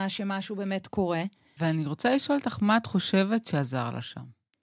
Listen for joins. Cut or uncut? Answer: cut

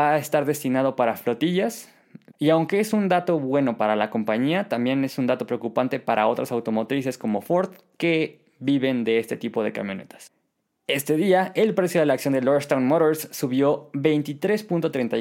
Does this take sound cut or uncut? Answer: cut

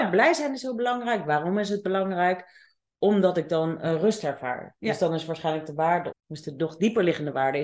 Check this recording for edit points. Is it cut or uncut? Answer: cut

